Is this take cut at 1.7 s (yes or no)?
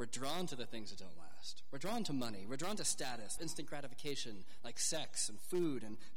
no